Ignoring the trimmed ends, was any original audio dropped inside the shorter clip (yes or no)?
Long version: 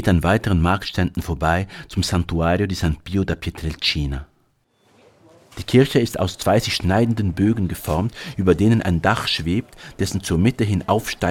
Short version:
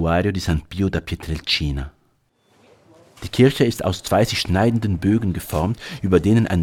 no